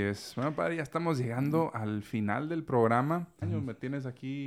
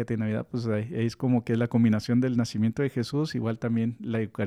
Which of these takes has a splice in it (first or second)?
first